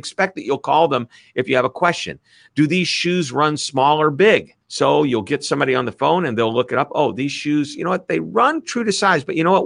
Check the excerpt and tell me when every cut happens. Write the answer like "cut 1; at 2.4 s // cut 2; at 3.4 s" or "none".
cut 1; at 4.6 s // cut 2; at 8.6 s